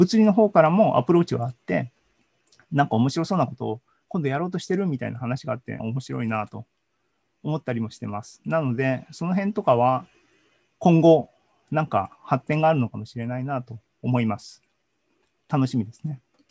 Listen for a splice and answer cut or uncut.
cut